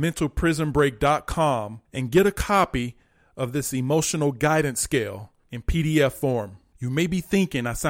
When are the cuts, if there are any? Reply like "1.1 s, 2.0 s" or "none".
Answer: 1.8 s